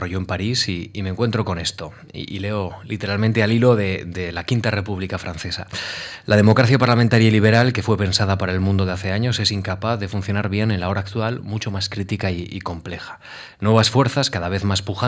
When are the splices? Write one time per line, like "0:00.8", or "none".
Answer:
none